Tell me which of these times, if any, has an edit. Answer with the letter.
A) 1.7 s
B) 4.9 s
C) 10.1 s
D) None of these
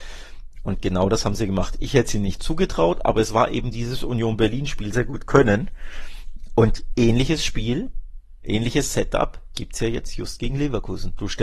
B